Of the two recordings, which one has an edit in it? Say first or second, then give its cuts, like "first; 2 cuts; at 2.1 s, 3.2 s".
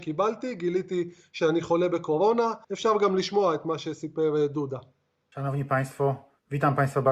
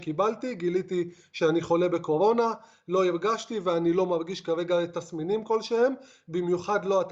first; 1 cut; at 2.6 s